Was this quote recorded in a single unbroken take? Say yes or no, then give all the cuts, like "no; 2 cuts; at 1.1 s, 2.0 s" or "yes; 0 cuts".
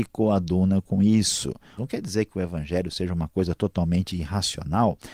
no; 1 cut; at 1.8 s